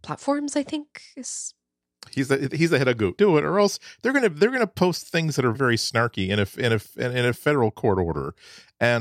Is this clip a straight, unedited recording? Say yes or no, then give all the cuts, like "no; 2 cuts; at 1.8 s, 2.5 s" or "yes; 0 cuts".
no; 2 cuts; at 3.2 s, 5.5 s